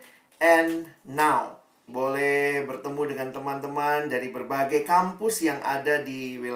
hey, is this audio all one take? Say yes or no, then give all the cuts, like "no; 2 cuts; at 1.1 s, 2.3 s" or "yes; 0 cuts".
no; 1 cut; at 1.9 s